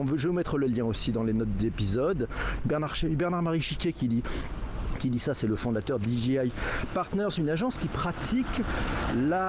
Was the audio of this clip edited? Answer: yes; 1 cut; at 2.6 s

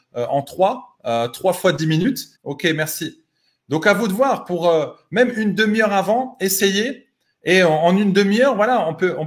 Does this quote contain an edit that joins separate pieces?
yes; 1 cut; at 2.4 s

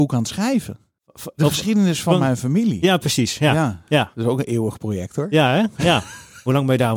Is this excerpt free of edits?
yes; 0 cuts

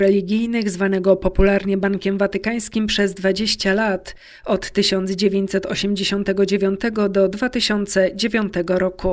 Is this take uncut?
yes; 0 cuts

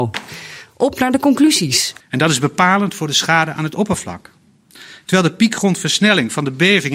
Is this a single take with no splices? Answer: no; 1 cut; at 2.0 s

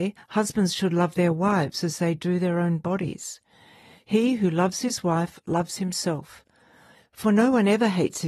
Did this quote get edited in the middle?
no; 0 cuts

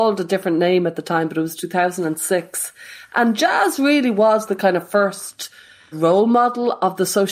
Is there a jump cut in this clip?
yes; 1 cut; at 5.9 s

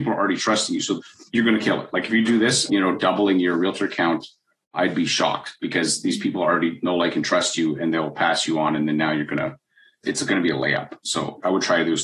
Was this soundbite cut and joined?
yes; 1 cut; at 2.7 s

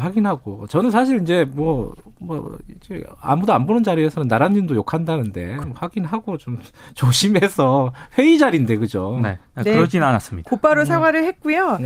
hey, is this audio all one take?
no; 2 cuts; at 5.6 s, 9.5 s

